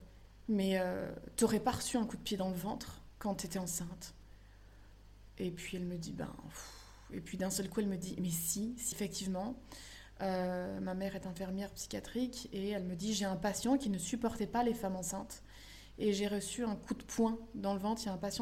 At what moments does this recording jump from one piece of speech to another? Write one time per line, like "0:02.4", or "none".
0:08.9